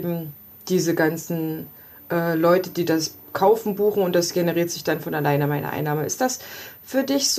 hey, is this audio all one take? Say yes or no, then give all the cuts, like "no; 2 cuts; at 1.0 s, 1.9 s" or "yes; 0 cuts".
yes; 0 cuts